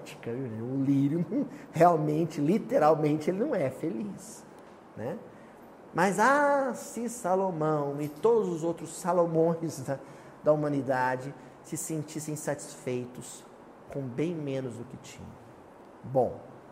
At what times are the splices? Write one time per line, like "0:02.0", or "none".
none